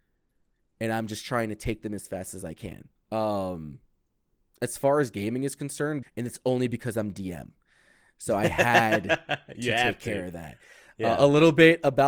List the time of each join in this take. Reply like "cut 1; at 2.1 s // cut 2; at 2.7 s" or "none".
cut 1; at 3.0 s // cut 2; at 6.0 s